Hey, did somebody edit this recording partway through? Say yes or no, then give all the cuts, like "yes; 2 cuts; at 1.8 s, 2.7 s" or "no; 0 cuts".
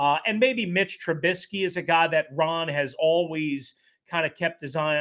no; 0 cuts